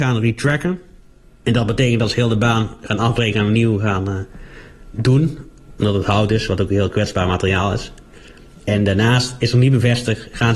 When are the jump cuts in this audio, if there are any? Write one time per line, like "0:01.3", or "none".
none